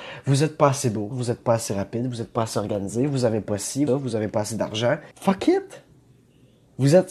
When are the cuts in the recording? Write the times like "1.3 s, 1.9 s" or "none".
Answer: 1.1 s, 3.9 s, 5.1 s

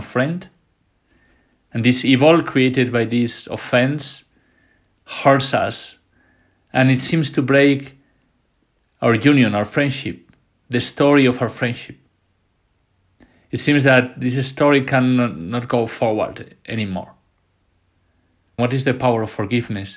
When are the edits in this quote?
18.6 s

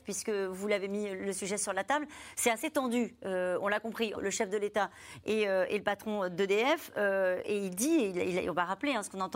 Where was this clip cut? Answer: 4.1 s

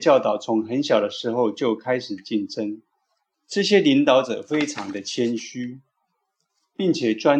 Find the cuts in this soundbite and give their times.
3.3 s

